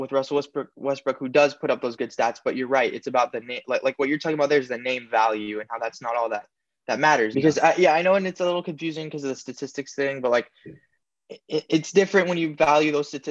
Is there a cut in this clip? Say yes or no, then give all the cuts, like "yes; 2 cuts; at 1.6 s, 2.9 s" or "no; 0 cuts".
yes; 1 cut; at 7.3 s